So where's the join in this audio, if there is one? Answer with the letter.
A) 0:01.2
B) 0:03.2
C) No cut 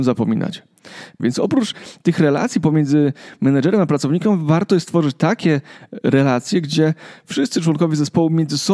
A